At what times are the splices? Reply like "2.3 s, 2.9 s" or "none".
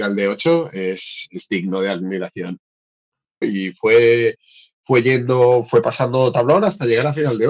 3.4 s